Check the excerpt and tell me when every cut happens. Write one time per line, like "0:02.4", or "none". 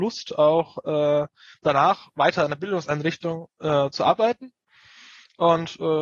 none